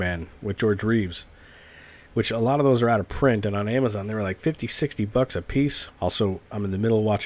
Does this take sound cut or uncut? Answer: cut